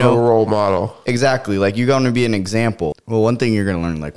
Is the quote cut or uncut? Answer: cut